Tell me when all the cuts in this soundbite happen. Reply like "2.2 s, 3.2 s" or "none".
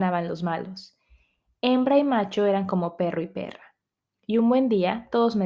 none

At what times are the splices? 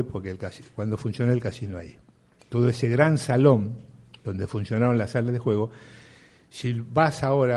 none

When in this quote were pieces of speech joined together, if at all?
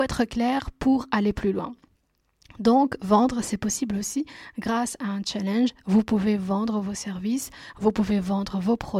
none

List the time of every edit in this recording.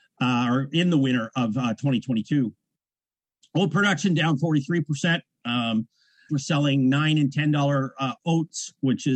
6.3 s

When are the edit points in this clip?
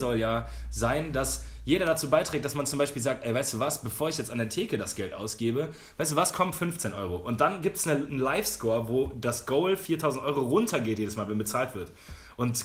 none

